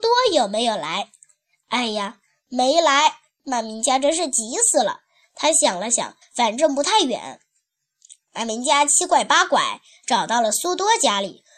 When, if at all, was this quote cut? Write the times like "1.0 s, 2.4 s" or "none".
6.2 s